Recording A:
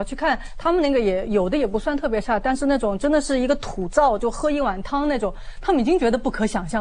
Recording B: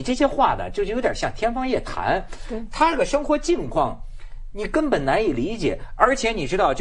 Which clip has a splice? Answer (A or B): A